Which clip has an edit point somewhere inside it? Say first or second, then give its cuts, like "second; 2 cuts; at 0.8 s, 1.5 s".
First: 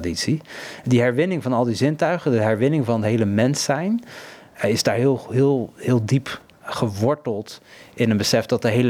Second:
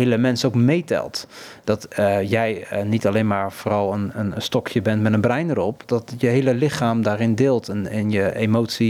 second; 1 cut; at 5.8 s